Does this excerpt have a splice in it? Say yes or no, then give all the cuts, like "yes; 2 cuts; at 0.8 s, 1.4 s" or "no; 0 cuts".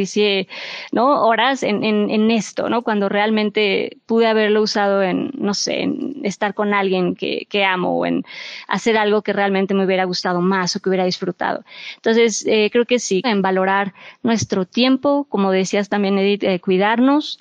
yes; 1 cut; at 13.2 s